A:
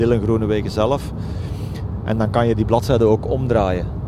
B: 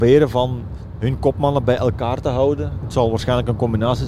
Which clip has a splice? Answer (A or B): B